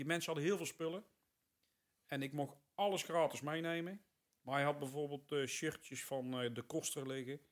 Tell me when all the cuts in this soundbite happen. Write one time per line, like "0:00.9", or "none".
none